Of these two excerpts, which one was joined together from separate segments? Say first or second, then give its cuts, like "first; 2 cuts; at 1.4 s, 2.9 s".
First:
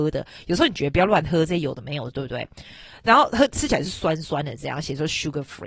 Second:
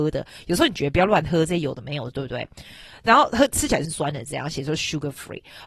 second; 1 cut; at 3.8 s